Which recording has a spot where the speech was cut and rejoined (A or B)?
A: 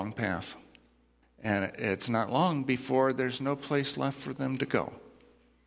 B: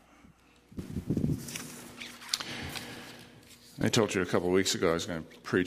A